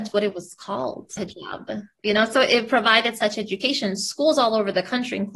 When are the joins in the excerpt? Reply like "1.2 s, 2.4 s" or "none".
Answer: 1.2 s